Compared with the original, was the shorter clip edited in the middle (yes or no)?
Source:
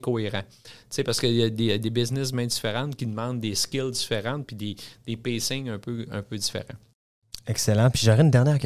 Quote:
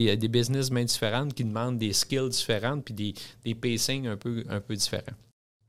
no